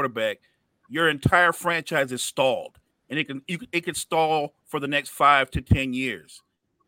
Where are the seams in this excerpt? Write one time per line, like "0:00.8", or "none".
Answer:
none

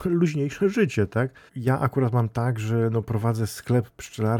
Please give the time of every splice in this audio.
0:01.5

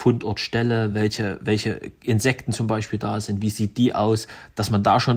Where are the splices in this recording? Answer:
none

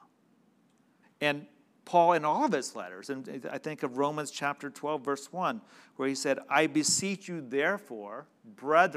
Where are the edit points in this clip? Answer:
0:01.0

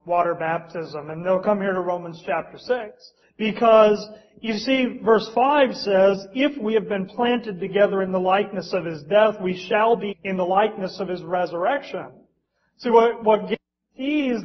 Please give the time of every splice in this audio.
0:03.2
0:10.1

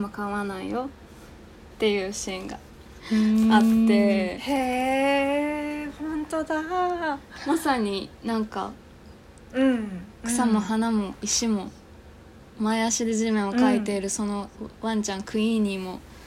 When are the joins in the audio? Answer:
none

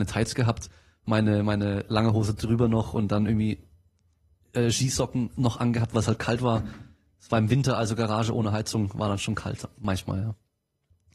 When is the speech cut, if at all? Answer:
none

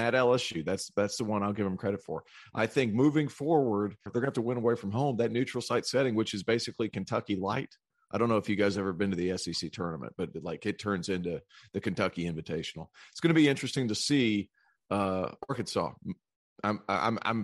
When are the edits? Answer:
0:04.1

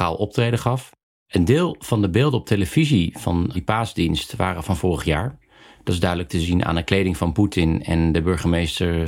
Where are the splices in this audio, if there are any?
0:03.5

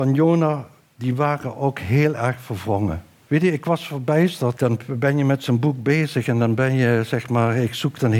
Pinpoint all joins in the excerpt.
0:03.3
0:04.5

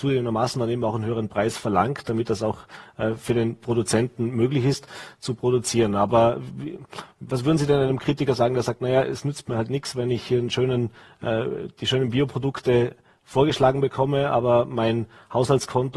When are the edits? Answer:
none

